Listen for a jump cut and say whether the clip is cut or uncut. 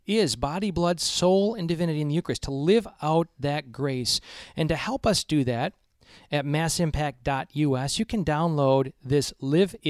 uncut